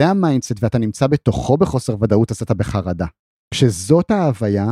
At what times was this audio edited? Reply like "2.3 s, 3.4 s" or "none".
3.4 s